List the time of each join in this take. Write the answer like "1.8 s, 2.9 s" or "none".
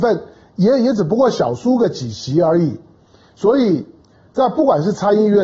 none